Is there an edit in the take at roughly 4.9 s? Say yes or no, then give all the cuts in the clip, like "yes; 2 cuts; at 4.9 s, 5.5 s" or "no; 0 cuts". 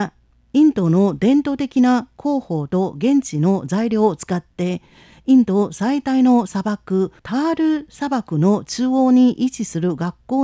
no; 1 cut; at 7.2 s